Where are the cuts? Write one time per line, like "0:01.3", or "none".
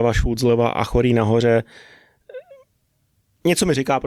none